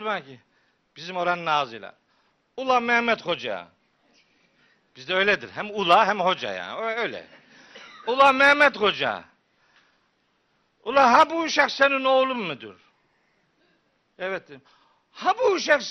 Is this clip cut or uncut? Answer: uncut